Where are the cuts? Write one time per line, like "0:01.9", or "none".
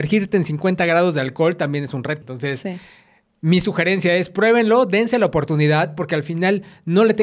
0:02.2